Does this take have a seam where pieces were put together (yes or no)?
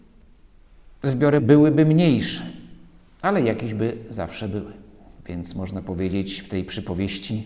yes